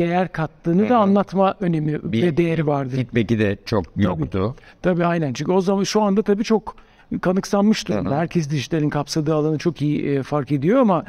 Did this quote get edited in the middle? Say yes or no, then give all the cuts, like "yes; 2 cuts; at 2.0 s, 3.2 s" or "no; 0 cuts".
no; 0 cuts